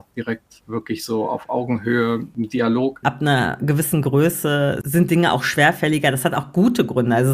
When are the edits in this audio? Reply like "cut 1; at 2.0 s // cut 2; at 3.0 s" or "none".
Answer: cut 1; at 3.0 s